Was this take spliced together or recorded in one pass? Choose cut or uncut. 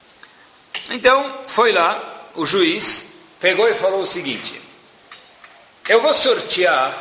uncut